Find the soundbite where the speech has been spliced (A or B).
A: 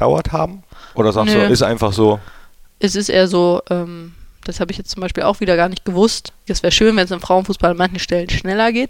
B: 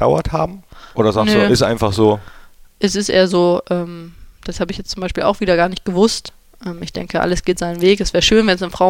A